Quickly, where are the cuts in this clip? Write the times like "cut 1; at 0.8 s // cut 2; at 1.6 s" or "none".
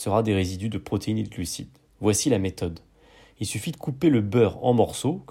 cut 1; at 1.9 s

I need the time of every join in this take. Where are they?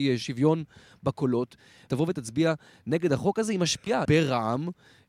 cut 1; at 1.9 s // cut 2; at 4.1 s

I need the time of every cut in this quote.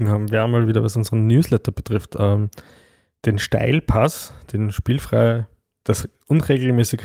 none

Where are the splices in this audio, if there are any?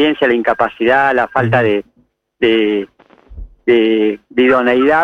none

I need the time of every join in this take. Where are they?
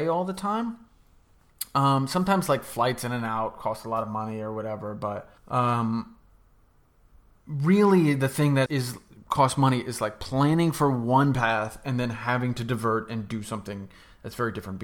cut 1; at 5.4 s // cut 2; at 8.7 s

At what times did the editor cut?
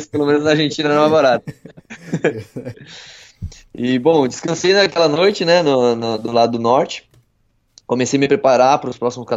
cut 1; at 2.7 s

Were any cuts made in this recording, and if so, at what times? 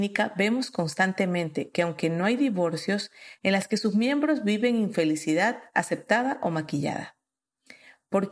cut 1; at 3.4 s

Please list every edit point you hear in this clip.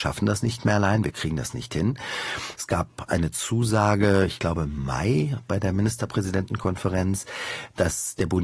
cut 1; at 2.6 s

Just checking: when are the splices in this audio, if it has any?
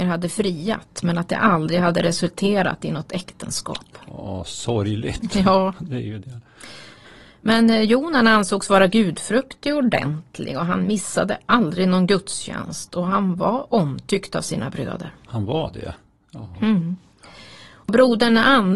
none

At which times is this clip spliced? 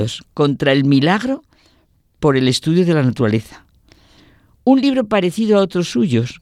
none

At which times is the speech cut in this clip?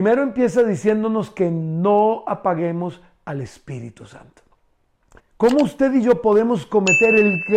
cut 1; at 5.2 s

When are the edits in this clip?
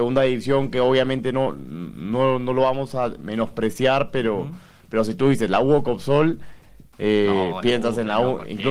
none

